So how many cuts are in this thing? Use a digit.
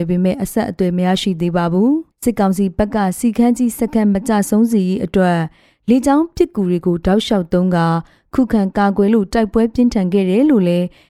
1